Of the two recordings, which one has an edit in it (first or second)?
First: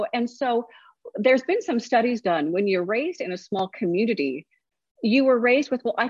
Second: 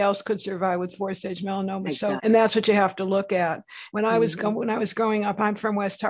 second